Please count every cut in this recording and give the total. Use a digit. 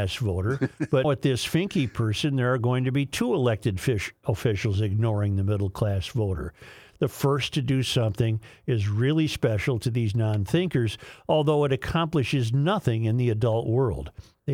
2